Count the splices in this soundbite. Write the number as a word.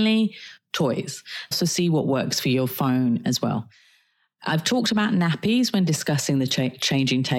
one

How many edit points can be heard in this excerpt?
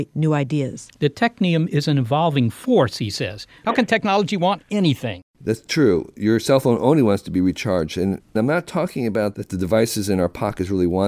one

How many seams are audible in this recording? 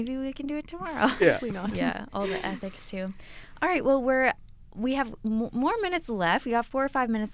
one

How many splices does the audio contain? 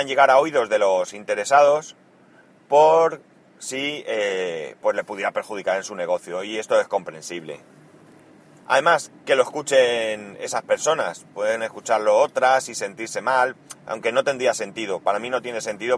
one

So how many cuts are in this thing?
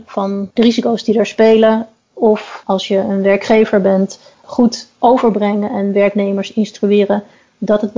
one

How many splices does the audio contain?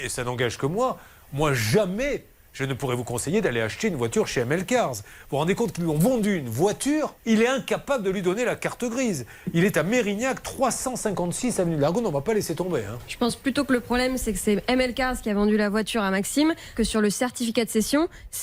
two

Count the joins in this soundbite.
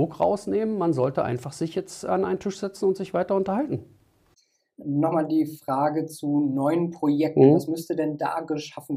zero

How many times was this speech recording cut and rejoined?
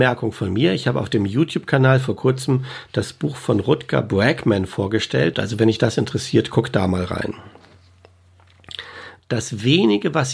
two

